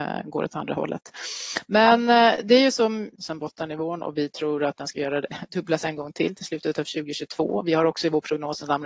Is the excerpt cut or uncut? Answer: cut